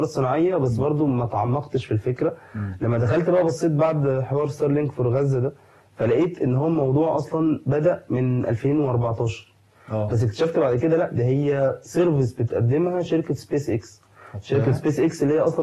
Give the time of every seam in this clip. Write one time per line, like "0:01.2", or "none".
0:10.1